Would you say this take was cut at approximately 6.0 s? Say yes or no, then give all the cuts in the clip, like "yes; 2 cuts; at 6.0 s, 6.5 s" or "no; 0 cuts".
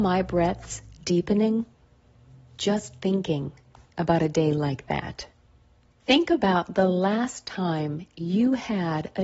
yes; 1 cut; at 6.0 s